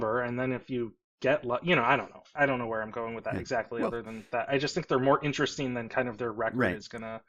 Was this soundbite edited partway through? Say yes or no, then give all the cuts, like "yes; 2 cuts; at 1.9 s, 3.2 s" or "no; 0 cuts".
no; 0 cuts